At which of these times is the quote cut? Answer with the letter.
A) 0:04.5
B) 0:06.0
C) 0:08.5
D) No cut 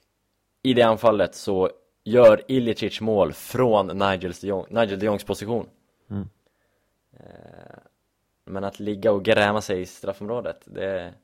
C